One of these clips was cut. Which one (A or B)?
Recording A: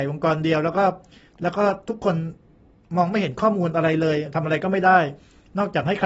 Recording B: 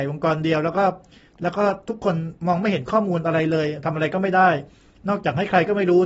B